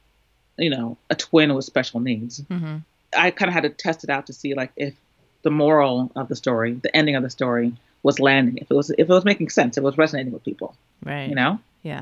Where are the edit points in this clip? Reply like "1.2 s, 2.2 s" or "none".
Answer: none